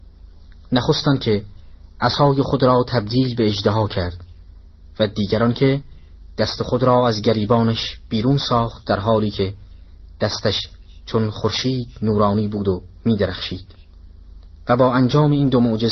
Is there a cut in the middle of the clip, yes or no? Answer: no